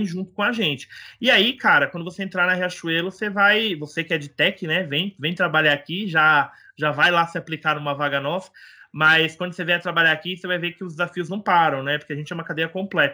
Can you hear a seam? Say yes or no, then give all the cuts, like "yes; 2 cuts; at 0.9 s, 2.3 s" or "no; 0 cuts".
no; 0 cuts